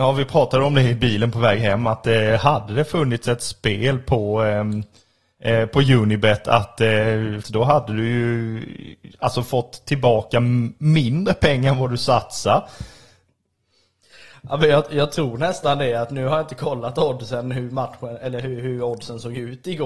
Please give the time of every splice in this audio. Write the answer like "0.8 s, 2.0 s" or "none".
7.4 s